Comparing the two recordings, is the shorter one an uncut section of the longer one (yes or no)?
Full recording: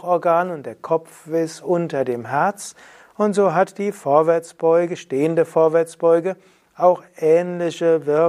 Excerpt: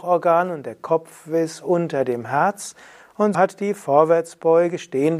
no